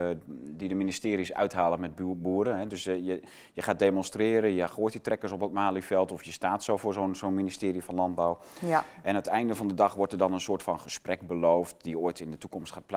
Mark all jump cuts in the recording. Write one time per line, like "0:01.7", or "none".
none